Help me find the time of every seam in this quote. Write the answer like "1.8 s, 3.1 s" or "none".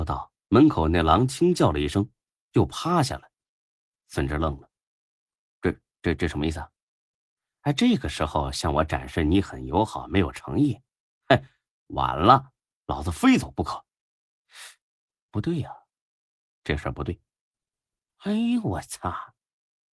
none